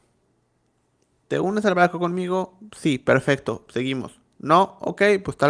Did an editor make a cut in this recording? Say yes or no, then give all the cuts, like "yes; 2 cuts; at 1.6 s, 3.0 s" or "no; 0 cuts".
no; 0 cuts